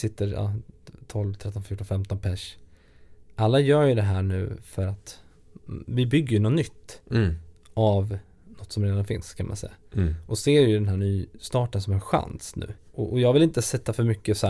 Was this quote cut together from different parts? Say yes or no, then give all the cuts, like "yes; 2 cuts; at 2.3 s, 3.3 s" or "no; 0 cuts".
yes; 1 cut; at 12.8 s